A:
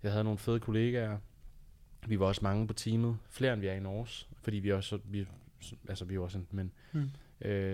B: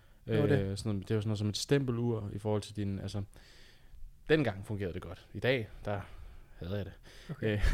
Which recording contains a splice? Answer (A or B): A